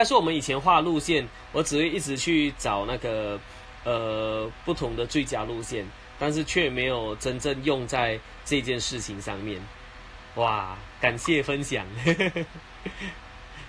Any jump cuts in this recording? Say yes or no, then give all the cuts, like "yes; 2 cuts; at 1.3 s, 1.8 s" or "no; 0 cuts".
no; 0 cuts